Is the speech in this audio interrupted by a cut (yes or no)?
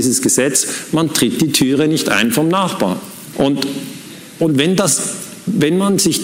yes